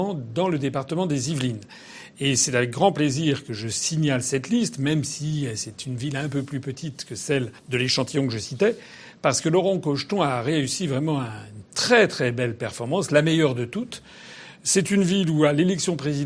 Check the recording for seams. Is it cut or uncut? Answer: cut